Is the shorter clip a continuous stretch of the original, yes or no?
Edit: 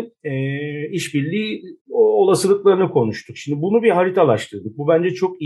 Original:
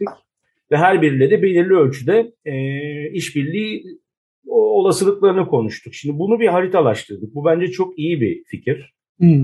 no